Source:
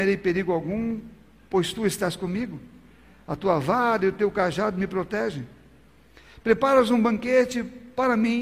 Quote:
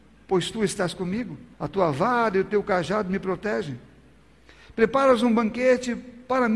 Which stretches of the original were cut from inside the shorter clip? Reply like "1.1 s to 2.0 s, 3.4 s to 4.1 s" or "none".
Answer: 2.8 s to 3.2 s